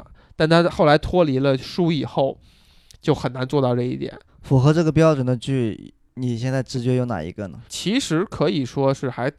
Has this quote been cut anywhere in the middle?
yes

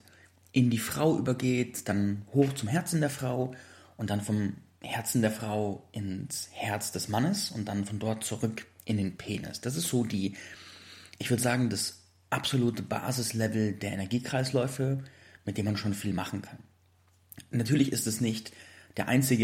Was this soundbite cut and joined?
no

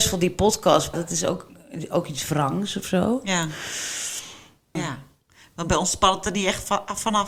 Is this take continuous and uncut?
no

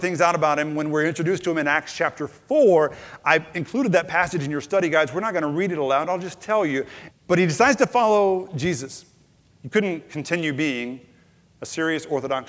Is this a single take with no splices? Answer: no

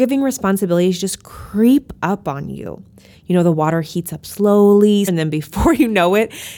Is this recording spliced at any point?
yes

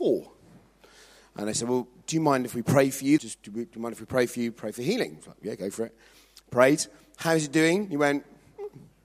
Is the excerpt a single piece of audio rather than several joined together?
no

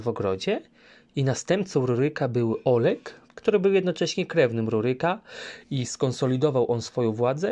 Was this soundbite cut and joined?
yes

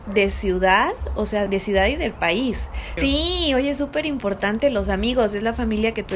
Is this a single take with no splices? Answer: no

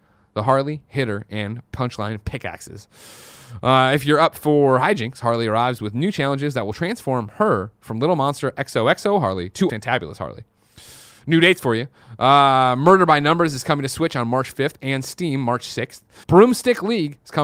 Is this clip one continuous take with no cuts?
no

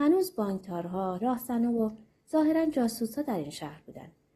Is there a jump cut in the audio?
yes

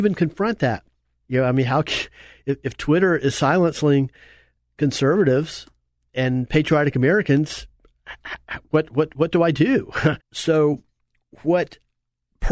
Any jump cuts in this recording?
yes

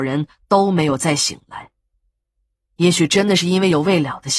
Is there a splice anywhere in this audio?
no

